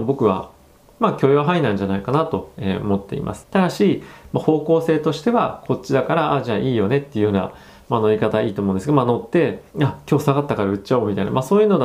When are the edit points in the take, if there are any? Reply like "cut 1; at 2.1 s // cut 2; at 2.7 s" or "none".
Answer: cut 1; at 3.4 s // cut 2; at 9.7 s